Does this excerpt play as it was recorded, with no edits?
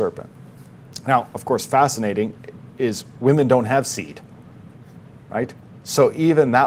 yes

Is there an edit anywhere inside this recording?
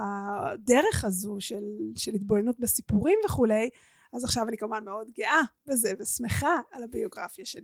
no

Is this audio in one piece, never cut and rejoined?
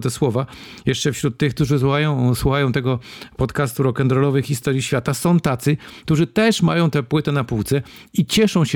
yes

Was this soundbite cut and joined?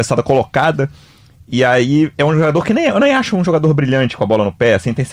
no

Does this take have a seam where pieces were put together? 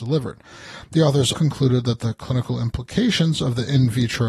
yes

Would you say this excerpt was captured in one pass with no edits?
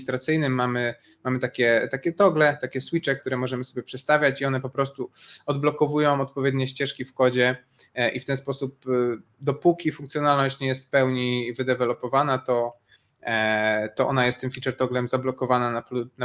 no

